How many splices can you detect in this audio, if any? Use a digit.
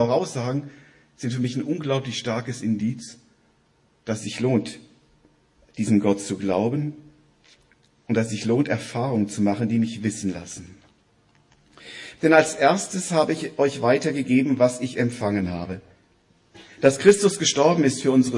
1